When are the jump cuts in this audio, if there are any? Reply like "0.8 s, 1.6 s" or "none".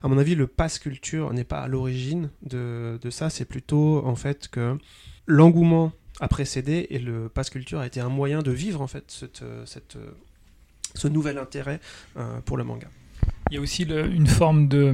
5.2 s